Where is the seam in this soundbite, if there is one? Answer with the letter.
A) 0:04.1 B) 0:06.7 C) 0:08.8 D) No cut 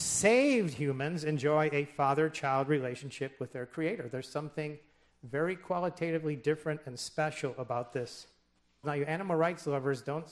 C